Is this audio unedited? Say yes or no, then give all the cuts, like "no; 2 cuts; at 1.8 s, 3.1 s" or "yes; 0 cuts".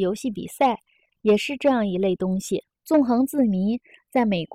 no; 1 cut; at 2.7 s